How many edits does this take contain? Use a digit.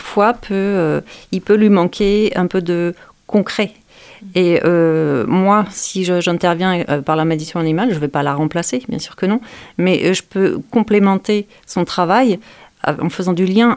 0